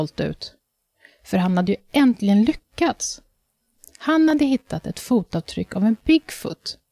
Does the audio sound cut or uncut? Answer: uncut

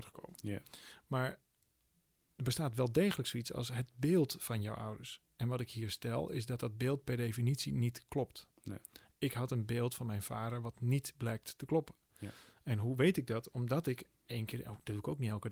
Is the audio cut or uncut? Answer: uncut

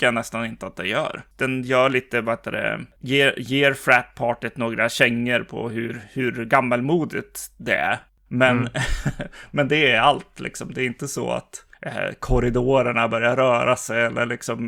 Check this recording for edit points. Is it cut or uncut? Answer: cut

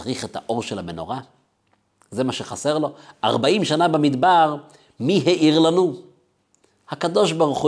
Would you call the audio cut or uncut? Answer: uncut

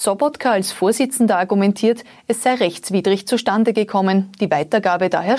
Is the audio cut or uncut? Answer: uncut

